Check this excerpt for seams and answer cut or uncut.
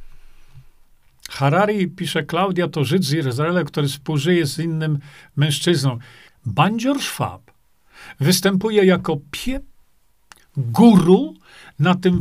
cut